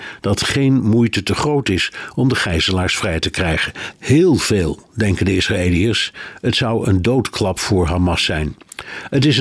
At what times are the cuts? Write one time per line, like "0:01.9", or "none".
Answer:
0:03.9

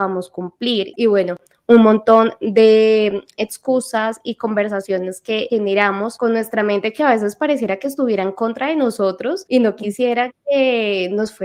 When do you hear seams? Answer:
0:00.9

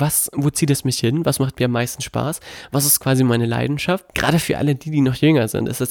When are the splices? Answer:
0:04.1

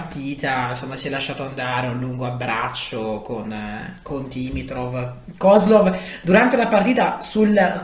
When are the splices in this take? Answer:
none

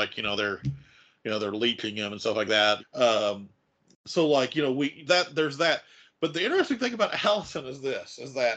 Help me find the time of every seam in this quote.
0:02.8
0:05.1

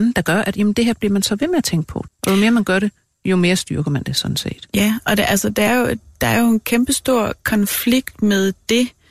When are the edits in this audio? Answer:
0:02.1
0:05.7

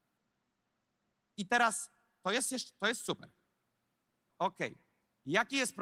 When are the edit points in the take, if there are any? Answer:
0:04.3

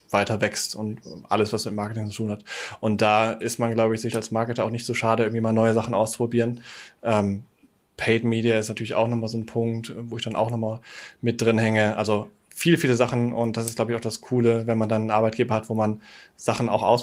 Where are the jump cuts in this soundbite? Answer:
none

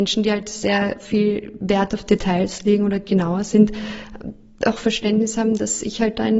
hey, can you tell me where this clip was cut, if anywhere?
none

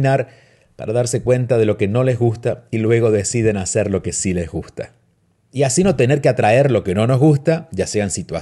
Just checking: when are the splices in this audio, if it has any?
0:05.5

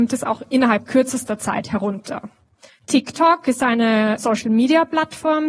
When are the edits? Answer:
0:02.7
0:04.2

